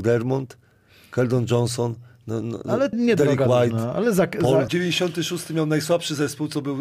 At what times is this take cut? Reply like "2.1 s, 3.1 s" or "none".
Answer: 2.9 s, 4.7 s